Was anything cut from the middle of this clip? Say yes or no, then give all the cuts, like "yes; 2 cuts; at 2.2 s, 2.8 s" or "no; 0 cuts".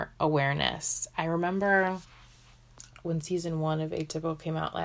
yes; 1 cut; at 3.0 s